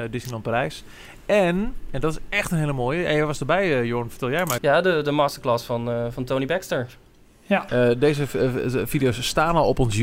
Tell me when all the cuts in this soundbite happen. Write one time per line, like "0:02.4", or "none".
0:04.6
0:07.7